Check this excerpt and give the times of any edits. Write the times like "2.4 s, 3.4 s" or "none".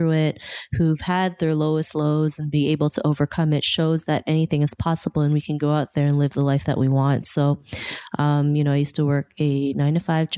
none